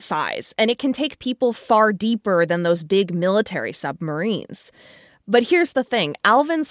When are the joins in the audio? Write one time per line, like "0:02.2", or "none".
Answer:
none